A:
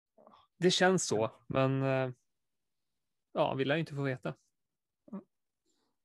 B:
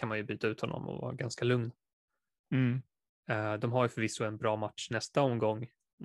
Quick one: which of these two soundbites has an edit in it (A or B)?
A